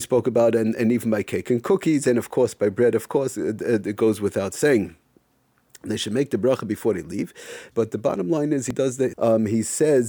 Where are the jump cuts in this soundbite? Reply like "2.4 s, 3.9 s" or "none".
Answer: 7.7 s, 9.1 s